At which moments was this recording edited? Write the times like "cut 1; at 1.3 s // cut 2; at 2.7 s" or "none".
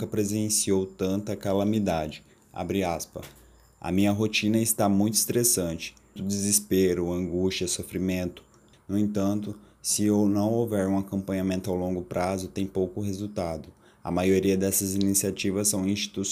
cut 1; at 6.2 s // cut 2; at 8.7 s